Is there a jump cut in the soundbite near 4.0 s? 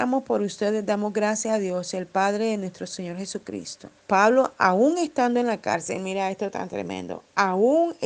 yes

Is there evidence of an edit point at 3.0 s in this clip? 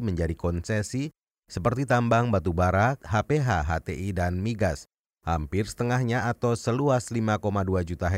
yes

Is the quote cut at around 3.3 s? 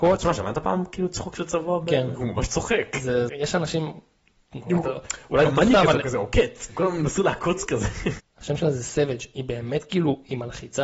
yes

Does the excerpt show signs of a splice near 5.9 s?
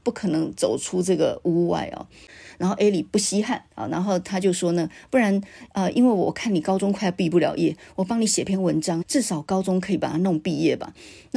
no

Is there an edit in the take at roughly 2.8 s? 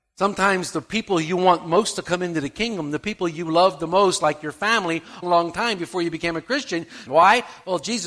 no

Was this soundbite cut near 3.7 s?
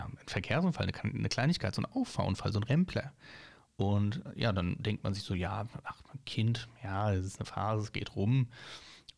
yes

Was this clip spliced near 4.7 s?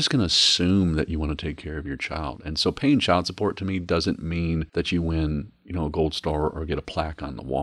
yes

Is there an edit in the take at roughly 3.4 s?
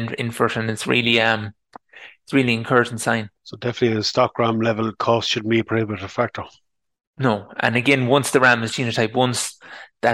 yes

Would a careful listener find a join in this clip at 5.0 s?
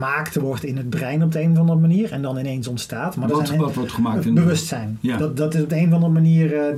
no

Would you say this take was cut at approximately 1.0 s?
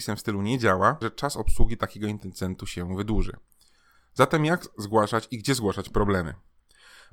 yes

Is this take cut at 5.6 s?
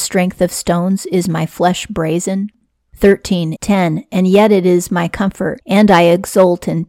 no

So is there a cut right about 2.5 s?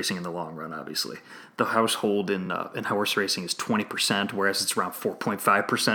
no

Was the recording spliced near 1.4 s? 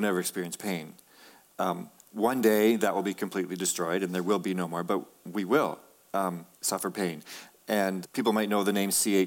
no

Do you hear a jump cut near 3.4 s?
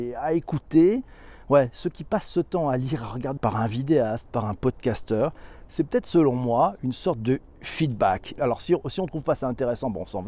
yes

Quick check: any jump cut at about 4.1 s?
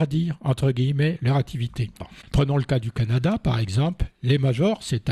no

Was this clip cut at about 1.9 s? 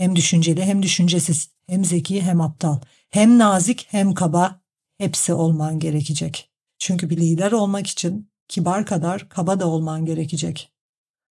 no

